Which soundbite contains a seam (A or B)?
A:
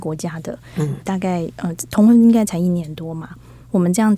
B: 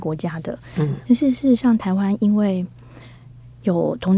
A